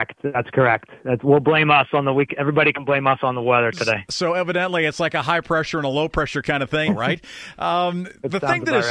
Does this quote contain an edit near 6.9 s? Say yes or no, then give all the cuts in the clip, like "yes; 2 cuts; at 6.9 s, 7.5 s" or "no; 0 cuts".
yes; 1 cut; at 6.9 s